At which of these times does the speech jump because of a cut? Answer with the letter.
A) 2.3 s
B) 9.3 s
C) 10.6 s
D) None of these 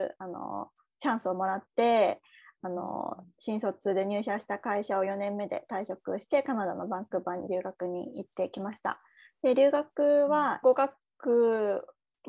C